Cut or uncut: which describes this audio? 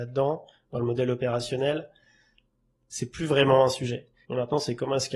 cut